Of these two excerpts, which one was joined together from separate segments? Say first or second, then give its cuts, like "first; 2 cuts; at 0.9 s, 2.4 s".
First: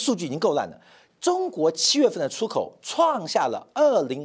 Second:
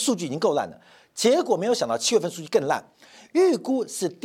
first; 1 cut; at 1.1 s